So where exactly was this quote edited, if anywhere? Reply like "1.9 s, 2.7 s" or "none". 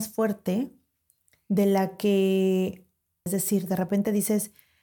3.3 s